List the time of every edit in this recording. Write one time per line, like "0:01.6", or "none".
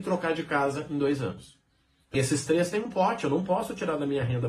0:02.1